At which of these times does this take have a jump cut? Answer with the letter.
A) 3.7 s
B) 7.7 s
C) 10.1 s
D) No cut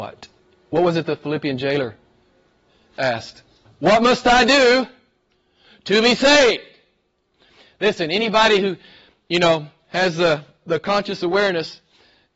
A